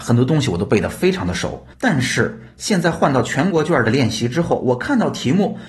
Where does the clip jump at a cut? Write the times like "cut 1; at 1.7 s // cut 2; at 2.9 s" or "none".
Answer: cut 1; at 1.7 s